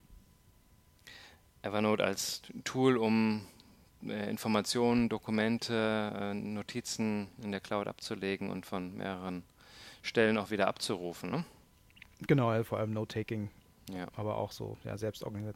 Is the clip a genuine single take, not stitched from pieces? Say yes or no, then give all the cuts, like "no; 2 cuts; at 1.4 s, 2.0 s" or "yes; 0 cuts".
yes; 0 cuts